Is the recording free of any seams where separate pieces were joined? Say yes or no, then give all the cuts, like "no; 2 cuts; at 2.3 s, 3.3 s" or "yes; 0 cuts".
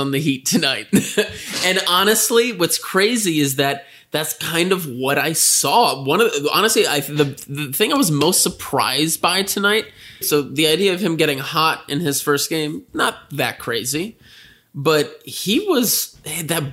no; 1 cut; at 10.2 s